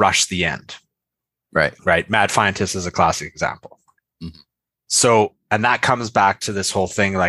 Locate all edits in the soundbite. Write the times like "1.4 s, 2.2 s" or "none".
none